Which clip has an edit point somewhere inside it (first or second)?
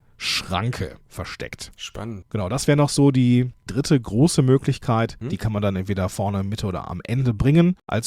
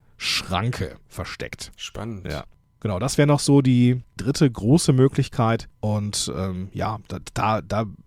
first